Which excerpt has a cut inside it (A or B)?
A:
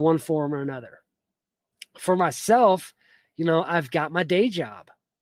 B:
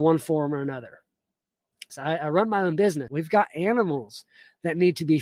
B